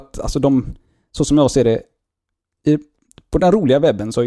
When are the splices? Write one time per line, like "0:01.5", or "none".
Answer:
none